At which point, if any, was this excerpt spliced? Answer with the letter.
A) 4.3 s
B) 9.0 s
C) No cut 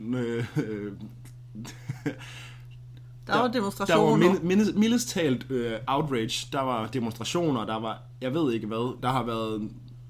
B